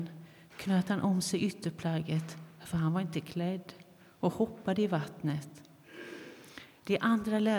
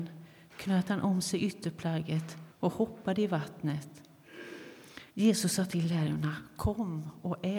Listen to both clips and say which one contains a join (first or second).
second